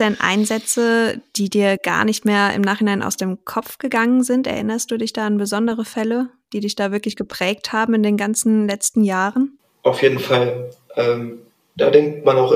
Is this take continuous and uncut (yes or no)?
yes